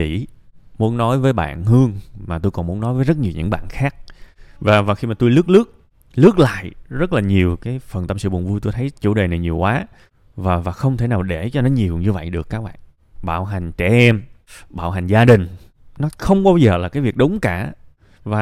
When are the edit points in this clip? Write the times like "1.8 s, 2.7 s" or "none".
none